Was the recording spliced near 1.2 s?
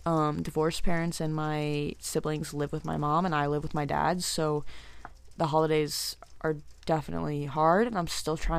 no; 0 cuts

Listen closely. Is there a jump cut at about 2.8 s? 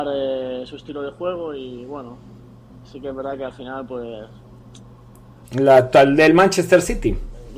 no; 1 cut; at 5.4 s

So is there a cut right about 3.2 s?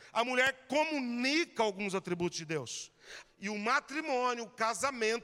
yes; 1 cut; at 3.2 s

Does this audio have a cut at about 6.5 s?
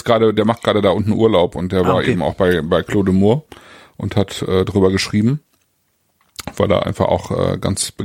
no; 0 cuts

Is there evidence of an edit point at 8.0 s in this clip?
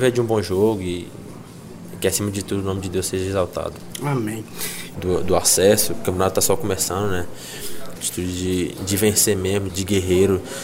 yes; 3 cuts; at 4.9 s, 8.0 s, 9.7 s

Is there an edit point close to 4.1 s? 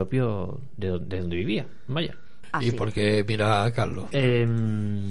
yes; 2 cuts; at 2.4 s, 4.1 s

